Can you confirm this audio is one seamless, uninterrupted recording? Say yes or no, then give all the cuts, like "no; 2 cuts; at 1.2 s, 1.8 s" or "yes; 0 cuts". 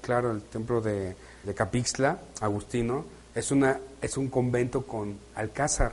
no; 1 cut; at 1.4 s